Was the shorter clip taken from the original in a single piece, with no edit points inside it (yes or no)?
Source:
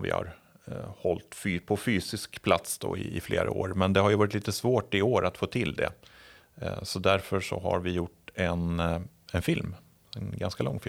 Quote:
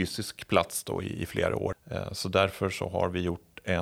no